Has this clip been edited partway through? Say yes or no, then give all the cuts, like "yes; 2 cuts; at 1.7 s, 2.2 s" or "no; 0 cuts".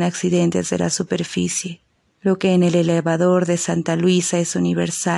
yes; 1 cut; at 2.2 s